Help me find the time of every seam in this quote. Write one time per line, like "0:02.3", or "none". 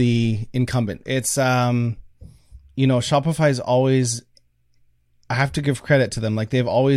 0:01.0